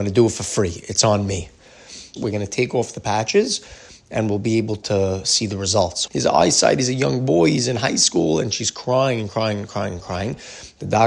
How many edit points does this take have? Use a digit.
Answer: 2